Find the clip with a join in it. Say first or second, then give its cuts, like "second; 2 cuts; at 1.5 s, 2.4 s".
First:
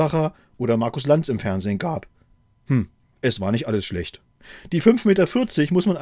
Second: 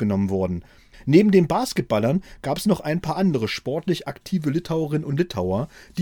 second; 1 cut; at 0.9 s